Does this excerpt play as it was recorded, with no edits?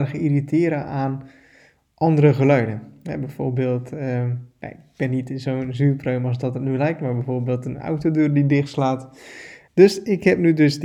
no; 1 cut; at 9.7 s

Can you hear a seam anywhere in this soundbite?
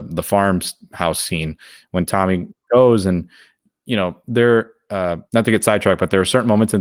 yes; 1 cut; at 5.3 s

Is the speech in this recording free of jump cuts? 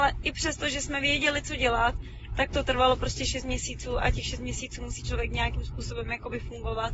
yes; 0 cuts

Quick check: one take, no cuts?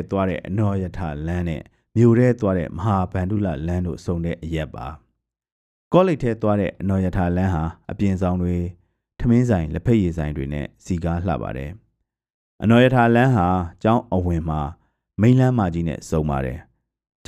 yes; 0 cuts

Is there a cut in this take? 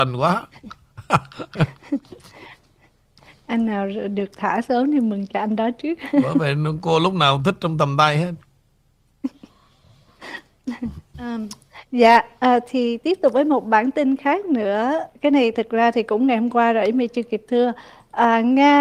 yes; 2 cuts; at 11.1 s, 15.2 s

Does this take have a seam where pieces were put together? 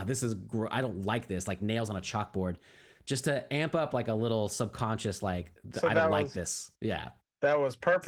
no; 0 cuts

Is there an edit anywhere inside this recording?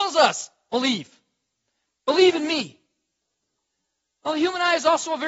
no; 0 cuts

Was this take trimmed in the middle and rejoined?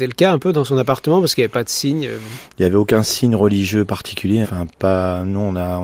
yes; 1 cut; at 4.4 s

